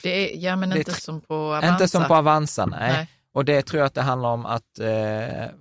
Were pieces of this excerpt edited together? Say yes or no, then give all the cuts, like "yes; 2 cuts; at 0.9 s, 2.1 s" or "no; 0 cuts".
yes; 1 cut; at 1.0 s